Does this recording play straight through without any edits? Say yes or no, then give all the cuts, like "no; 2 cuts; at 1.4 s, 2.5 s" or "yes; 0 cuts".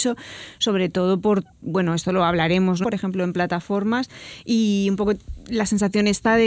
no; 1 cut; at 2.8 s